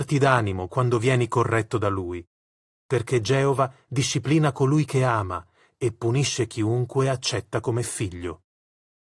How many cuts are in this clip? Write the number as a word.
zero